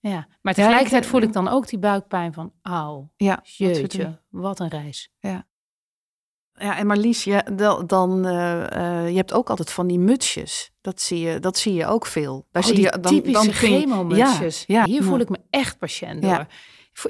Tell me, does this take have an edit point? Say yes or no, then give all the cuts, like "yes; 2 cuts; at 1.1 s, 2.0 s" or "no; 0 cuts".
yes; 2 cuts; at 13.0 s, 14.9 s